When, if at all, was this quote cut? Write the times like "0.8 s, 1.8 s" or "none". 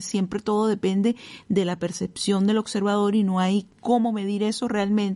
none

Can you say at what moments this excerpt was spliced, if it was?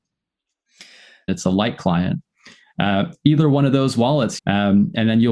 1.3 s, 4.4 s

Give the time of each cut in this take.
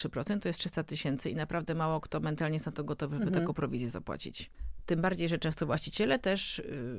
none

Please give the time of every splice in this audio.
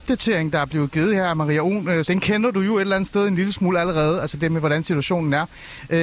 2.0 s

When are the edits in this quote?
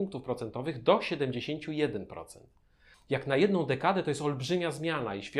none

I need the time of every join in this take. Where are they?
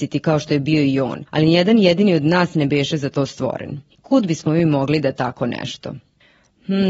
3.9 s

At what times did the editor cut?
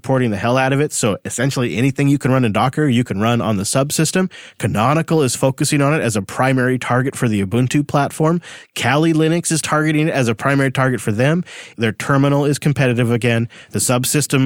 11.7 s

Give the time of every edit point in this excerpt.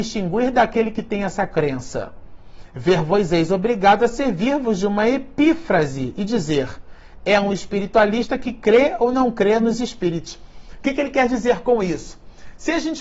none

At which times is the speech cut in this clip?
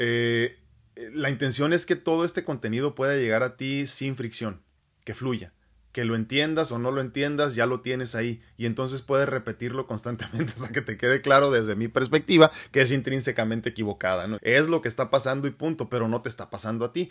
14.4 s

